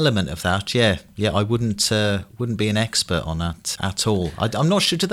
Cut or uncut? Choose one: cut